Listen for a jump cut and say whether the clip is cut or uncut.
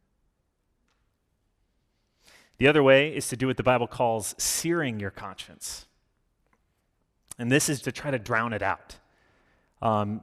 cut